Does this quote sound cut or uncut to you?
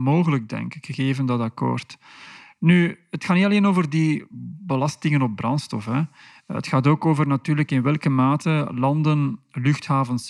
uncut